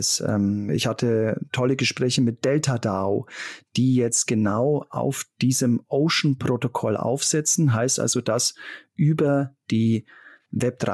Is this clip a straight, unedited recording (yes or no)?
yes